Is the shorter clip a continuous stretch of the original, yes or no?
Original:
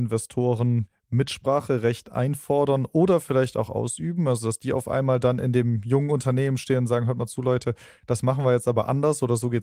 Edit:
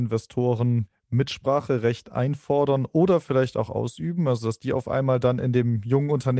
yes